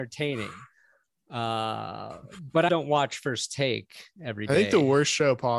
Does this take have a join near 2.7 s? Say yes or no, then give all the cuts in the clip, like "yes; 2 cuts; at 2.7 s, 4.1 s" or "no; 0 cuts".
yes; 1 cut; at 2.7 s